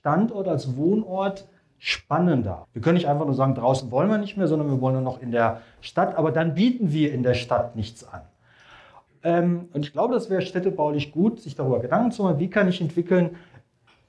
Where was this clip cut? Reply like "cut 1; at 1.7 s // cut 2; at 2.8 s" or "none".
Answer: cut 1; at 2.6 s // cut 2; at 9.1 s